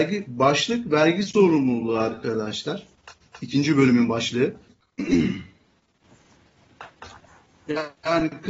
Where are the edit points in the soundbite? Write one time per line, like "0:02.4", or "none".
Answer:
0:04.7